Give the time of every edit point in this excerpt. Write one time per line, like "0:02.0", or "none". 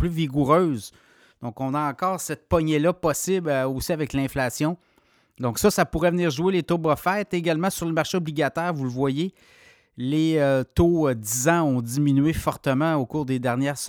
none